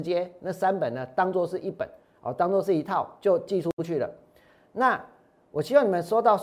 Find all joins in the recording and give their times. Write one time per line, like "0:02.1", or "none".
none